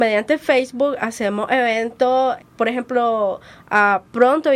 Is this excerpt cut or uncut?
cut